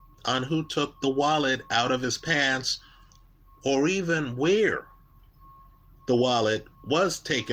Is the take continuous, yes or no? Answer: yes